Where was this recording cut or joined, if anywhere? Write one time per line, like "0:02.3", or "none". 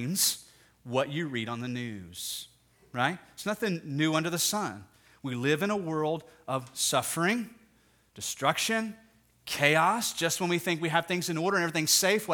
0:08.1